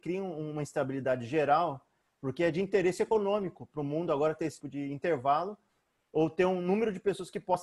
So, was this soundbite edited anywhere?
yes; 1 cut; at 4.6 s

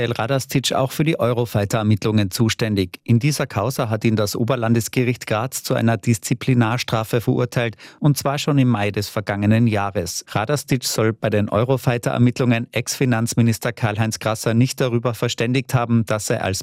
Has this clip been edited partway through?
yes; 1 cut; at 10.2 s

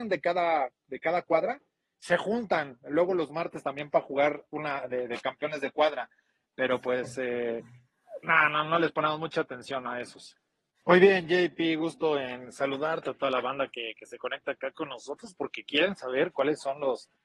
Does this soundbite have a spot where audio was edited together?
yes; 1 cut; at 10.8 s

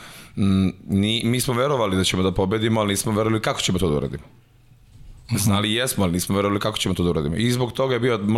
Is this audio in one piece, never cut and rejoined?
yes; 0 cuts

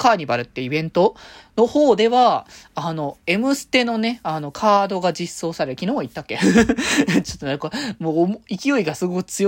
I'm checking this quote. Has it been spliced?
no; 0 cuts

